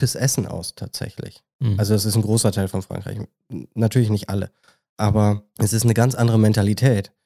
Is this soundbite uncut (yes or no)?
yes